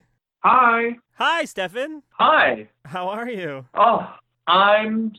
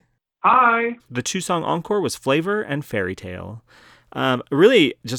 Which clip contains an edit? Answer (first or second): second